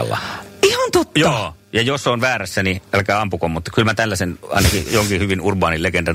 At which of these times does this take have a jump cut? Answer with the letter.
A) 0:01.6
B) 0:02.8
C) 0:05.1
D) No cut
D